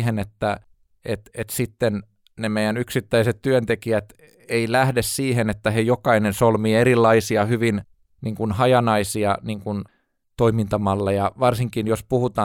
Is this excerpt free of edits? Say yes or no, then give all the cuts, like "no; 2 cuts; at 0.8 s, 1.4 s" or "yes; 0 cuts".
yes; 0 cuts